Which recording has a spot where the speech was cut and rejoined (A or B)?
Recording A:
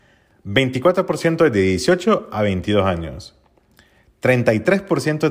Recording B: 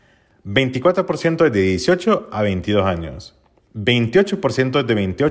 B